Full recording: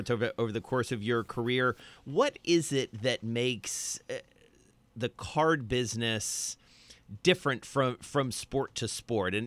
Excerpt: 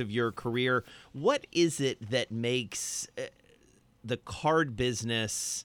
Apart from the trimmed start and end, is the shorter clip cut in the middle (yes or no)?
no